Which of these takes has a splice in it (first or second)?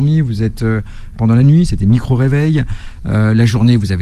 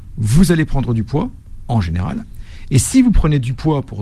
first